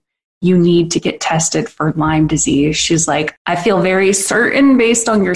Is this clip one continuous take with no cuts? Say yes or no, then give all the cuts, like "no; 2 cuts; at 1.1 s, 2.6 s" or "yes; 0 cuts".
no; 1 cut; at 3.4 s